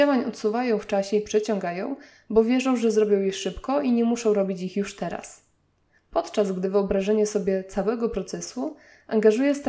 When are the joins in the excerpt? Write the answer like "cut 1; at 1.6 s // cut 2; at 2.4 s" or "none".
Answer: none